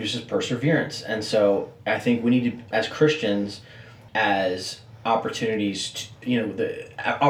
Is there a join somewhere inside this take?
yes; 3 cuts; at 2.7 s, 4.1 s, 6.2 s

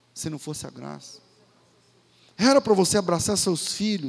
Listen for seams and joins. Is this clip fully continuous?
yes; 0 cuts

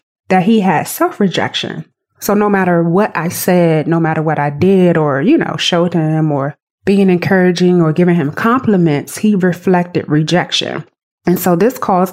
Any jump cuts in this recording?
no; 0 cuts

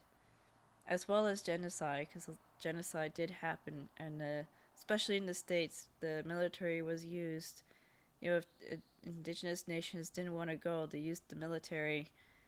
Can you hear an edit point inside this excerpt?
no; 0 cuts

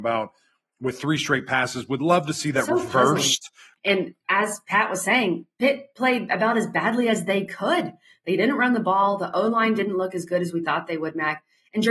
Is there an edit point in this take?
yes; 1 cut; at 3.8 s

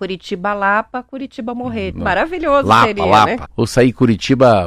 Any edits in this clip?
yes; 2 cuts; at 1.9 s, 3.5 s

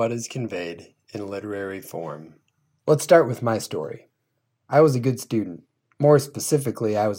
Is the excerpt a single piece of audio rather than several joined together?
yes; 0 cuts

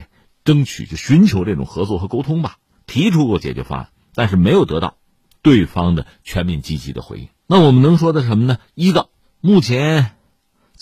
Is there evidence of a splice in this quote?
yes; 1 cut; at 7.4 s

